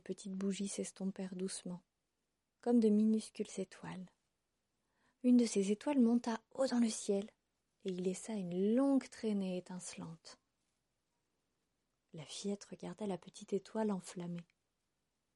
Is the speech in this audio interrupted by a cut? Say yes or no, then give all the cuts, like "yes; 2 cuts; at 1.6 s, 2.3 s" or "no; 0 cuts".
no; 0 cuts